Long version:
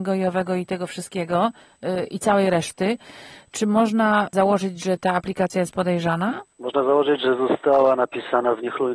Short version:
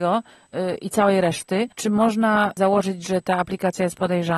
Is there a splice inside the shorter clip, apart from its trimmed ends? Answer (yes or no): yes